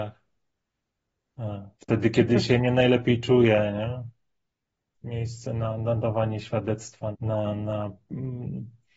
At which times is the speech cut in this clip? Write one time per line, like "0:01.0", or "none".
0:01.7
0:04.9
0:07.1